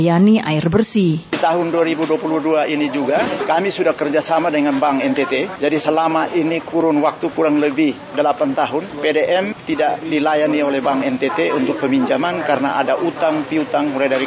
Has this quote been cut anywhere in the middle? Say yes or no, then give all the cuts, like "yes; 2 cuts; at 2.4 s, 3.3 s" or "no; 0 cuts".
no; 0 cuts